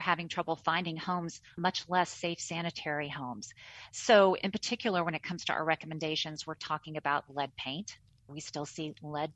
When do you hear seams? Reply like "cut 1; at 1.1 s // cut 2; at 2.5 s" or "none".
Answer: none